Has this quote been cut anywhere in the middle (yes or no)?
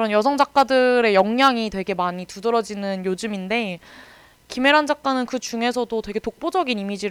no